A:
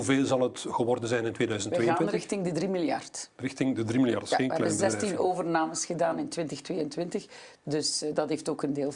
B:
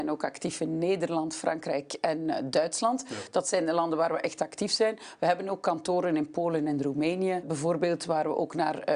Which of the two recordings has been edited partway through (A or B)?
B